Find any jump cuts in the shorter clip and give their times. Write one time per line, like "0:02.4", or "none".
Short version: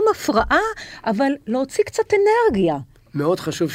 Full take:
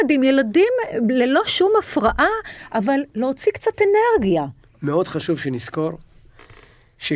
none